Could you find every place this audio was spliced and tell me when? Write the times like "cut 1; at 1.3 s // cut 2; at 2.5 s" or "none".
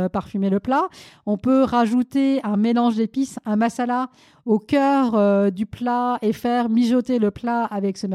none